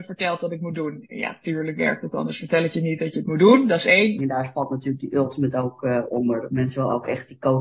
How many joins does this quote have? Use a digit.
1